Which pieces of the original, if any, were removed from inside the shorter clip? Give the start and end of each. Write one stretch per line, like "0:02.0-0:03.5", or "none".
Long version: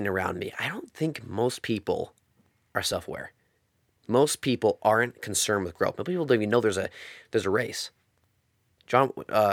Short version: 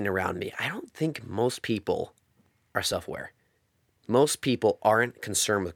none